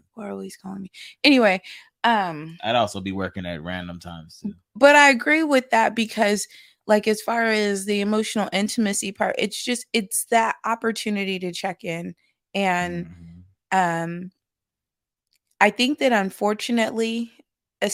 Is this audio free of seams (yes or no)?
yes